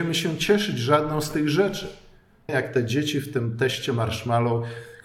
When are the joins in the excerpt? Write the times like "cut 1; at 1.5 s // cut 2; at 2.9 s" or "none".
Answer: cut 1; at 2.5 s

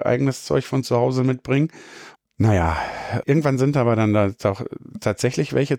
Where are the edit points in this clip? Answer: cut 1; at 2.1 s // cut 2; at 3.2 s

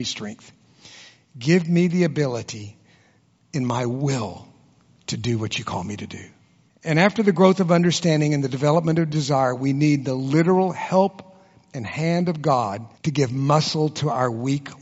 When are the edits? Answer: cut 1; at 6.7 s // cut 2; at 12.9 s

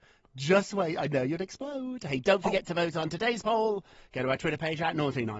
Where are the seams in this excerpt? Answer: none

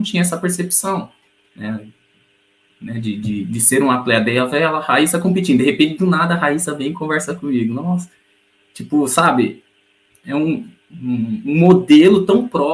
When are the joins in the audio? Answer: none

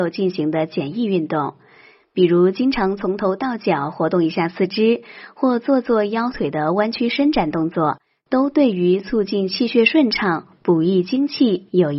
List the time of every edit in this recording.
none

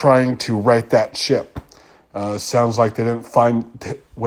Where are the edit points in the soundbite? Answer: none

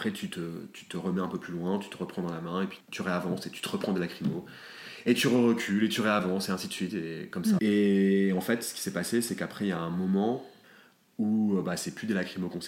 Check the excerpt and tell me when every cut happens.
cut 1; at 7.6 s

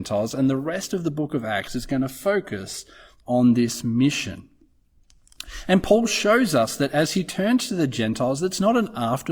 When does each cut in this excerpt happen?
none

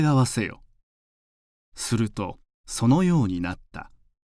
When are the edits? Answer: cut 1; at 1.7 s

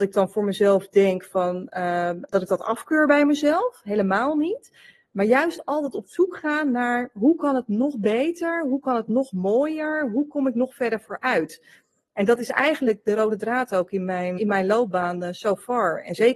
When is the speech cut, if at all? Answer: cut 1; at 14.4 s

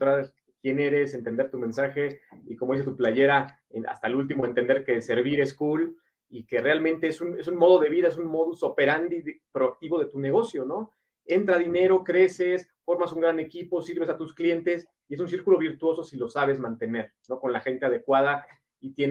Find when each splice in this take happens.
none

